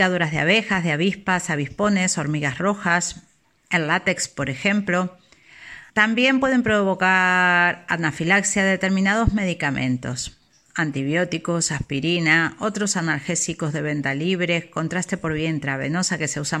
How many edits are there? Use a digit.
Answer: 1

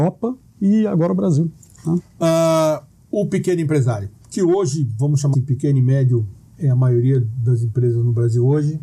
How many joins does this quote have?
2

